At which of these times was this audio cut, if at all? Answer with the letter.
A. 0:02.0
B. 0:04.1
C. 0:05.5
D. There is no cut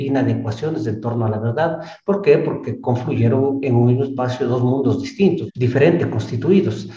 C